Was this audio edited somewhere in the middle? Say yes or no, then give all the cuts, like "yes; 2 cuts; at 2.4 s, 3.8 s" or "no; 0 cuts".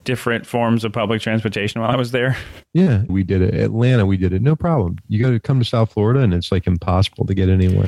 yes; 1 cut; at 3.1 s